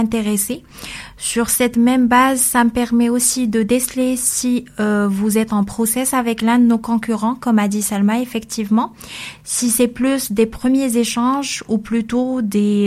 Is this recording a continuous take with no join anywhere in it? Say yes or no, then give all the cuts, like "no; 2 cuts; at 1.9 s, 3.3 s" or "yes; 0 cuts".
yes; 0 cuts